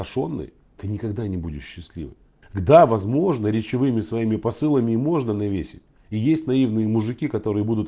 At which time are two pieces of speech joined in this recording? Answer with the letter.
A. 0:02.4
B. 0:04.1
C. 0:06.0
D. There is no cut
A